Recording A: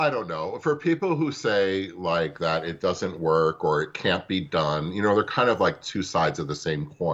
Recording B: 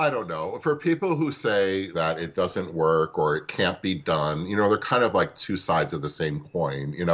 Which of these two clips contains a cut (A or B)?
B